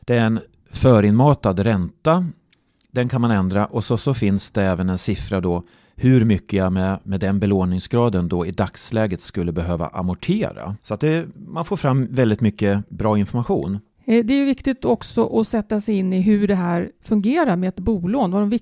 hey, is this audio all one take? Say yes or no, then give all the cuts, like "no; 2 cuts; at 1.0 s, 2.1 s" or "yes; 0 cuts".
no; 2 cuts; at 10.8 s, 13.9 s